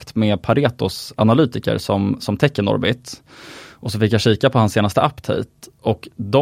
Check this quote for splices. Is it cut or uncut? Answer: uncut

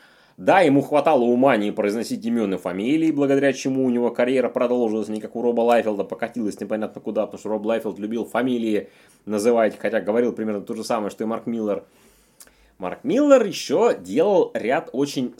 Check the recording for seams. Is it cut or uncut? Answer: uncut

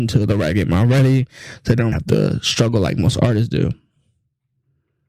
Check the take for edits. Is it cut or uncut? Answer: cut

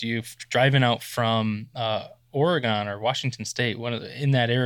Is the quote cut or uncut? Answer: uncut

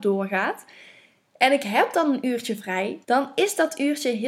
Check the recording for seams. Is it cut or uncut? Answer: cut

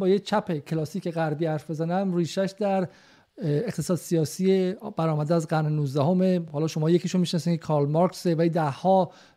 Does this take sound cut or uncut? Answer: uncut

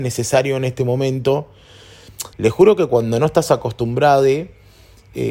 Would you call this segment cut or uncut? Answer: cut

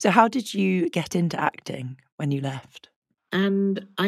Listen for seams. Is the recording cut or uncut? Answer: cut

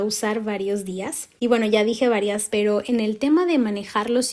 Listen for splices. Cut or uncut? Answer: cut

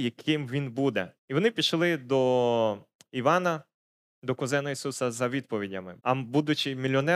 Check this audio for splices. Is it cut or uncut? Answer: cut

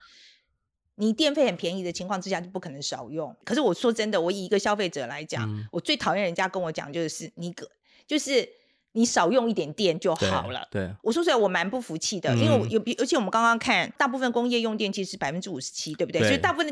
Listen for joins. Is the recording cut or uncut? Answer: uncut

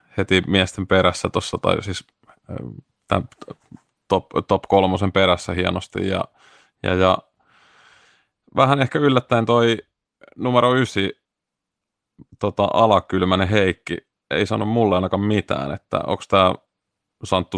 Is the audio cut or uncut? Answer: uncut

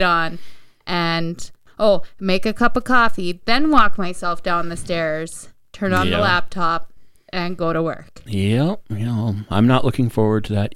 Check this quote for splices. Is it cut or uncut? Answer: uncut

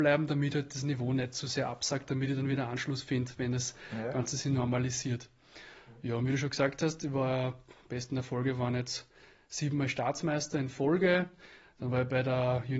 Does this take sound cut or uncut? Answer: uncut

